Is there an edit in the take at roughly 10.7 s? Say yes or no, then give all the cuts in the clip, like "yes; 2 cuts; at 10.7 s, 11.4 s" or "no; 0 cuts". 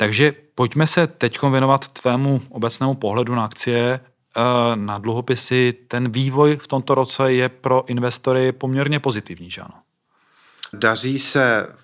yes; 1 cut; at 10.7 s